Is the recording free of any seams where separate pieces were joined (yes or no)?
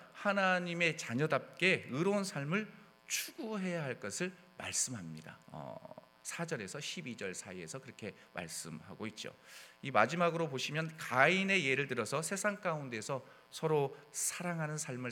no